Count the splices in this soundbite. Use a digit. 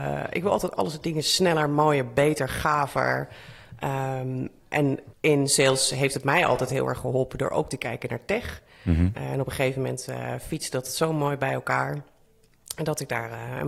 1